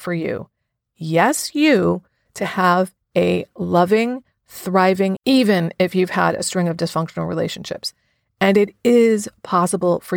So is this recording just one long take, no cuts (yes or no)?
no